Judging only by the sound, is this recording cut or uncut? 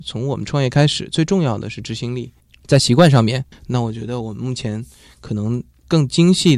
uncut